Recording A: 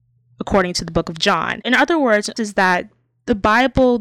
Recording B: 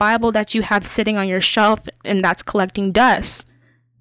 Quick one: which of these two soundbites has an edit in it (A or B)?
A